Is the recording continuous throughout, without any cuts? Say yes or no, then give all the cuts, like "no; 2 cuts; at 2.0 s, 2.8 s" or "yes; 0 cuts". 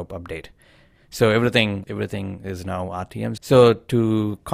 no; 2 cuts; at 1.8 s, 3.4 s